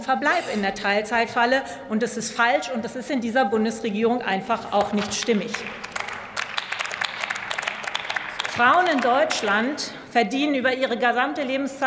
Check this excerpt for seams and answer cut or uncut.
uncut